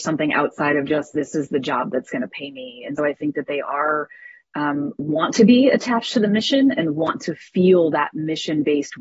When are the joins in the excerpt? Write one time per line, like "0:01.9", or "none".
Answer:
0:03.0